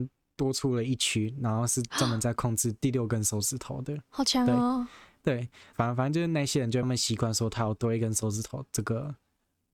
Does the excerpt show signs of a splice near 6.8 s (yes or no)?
yes